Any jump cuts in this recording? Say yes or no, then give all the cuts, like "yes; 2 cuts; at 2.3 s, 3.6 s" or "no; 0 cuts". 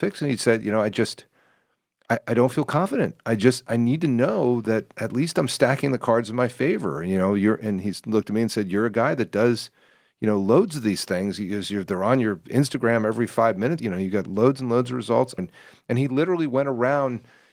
yes; 2 cuts; at 13.8 s, 15.4 s